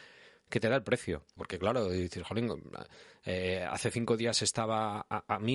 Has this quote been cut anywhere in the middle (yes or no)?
yes